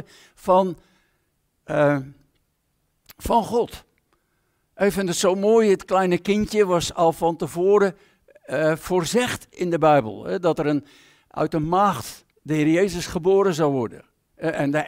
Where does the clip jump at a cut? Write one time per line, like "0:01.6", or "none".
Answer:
0:12.3